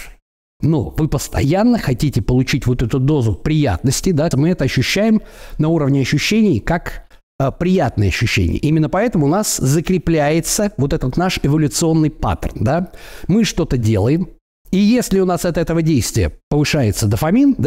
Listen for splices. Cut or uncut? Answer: cut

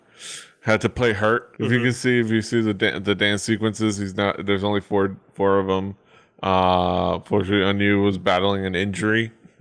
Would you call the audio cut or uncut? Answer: cut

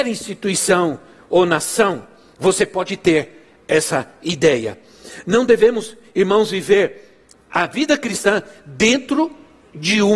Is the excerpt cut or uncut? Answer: uncut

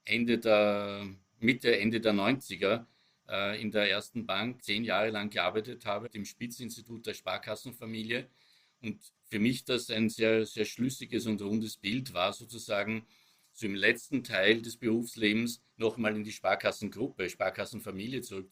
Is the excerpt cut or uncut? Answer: cut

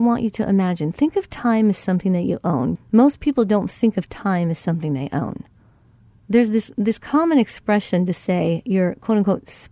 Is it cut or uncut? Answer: cut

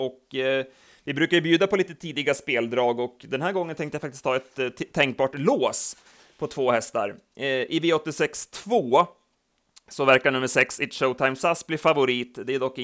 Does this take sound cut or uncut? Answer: uncut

